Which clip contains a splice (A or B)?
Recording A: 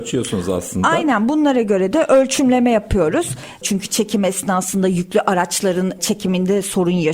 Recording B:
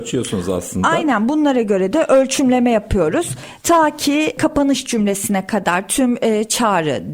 A